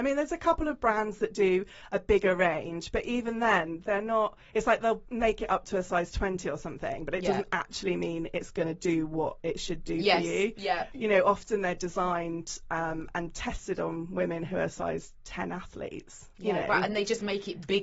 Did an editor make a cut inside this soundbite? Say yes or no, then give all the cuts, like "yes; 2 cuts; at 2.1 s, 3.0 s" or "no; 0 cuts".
no; 0 cuts